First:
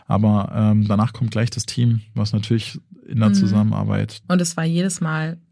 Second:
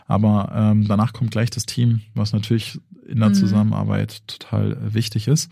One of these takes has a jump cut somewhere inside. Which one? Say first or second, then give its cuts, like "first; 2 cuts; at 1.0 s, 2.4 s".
first; 1 cut; at 4.2 s